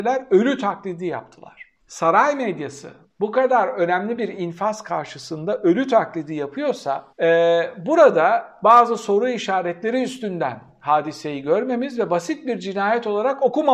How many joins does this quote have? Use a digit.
2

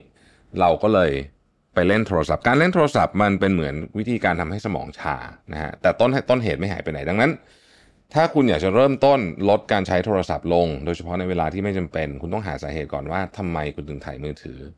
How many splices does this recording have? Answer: 1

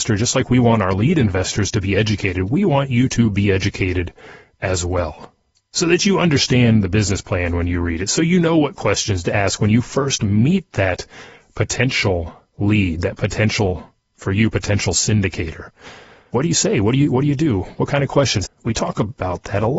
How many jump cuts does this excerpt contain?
1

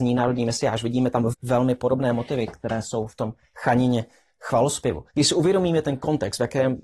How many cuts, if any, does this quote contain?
1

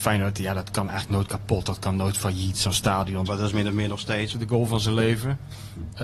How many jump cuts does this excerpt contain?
2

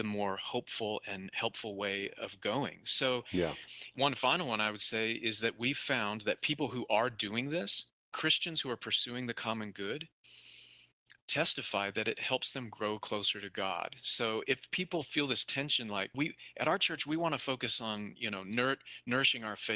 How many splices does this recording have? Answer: 1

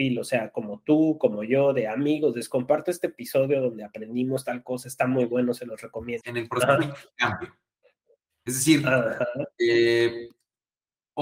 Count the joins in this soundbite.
1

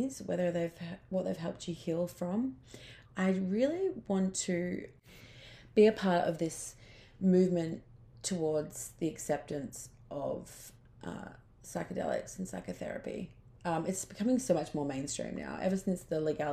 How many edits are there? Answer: 1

